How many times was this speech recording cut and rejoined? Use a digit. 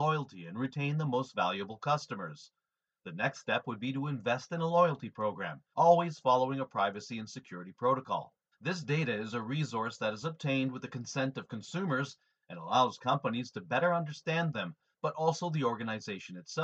2